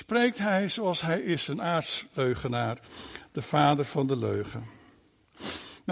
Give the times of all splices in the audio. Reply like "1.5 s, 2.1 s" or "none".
none

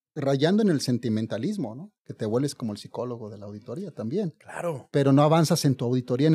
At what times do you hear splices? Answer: 2.0 s

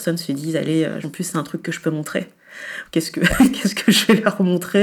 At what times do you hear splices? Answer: 1.0 s, 2.9 s

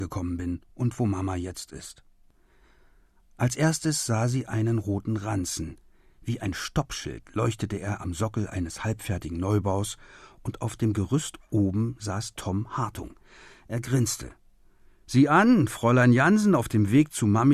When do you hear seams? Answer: none

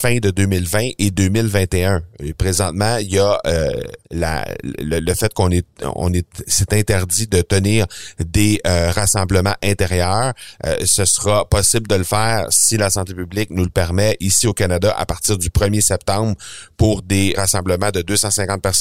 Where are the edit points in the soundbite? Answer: 4.0 s, 17.3 s

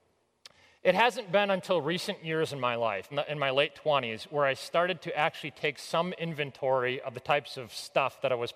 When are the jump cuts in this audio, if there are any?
3.1 s

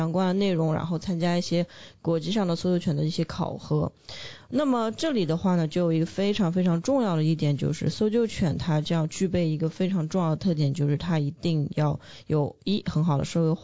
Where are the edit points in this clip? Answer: none

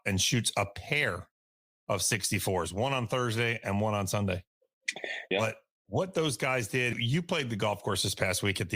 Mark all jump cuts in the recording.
5.3 s, 6.9 s

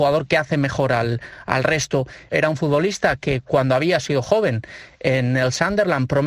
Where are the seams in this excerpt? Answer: 2.3 s

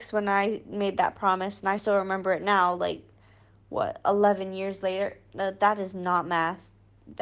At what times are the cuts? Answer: none

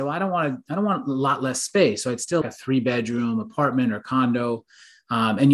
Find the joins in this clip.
2.4 s

